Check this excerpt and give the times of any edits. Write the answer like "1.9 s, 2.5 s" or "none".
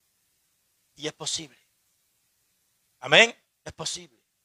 none

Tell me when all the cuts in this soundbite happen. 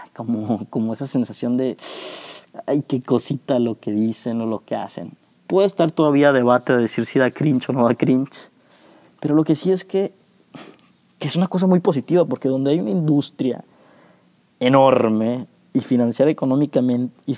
5.4 s

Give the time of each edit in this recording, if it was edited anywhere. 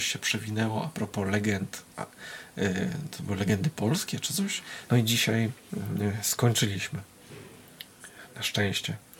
4.9 s

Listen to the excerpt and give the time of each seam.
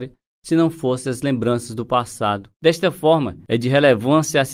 2.5 s

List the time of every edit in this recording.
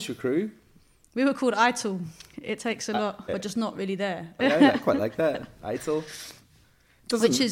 3.3 s, 4.4 s

